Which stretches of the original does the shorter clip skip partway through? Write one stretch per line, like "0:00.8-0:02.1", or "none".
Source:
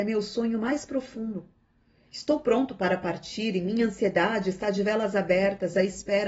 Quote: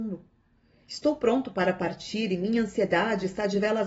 none